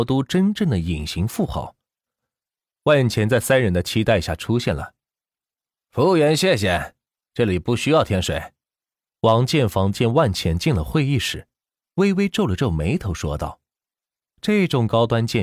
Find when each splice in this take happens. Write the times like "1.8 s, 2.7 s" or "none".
none